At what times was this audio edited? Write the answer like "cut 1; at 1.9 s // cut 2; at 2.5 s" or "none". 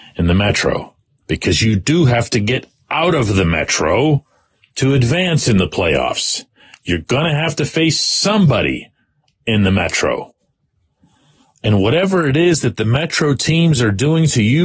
none

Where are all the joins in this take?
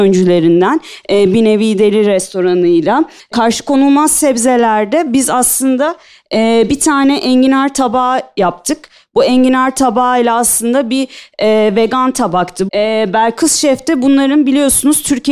cut 1; at 12.7 s

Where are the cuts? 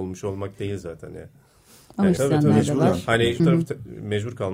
cut 1; at 2.2 s // cut 2; at 3.4 s

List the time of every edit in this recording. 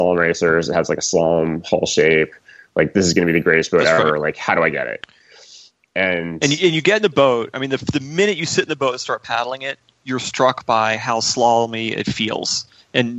none

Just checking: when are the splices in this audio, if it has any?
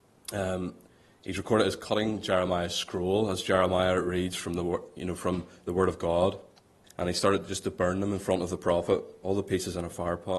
cut 1; at 6.8 s // cut 2; at 9.2 s

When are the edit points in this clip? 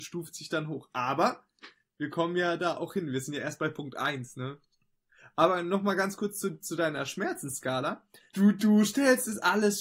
cut 1; at 8.3 s

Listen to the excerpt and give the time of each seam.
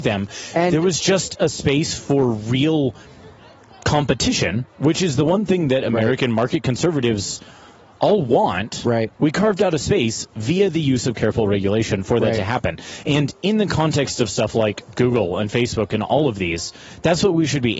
cut 1; at 9.2 s

